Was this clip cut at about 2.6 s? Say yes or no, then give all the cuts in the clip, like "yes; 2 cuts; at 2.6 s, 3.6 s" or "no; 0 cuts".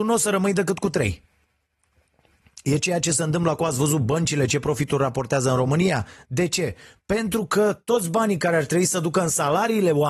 no; 0 cuts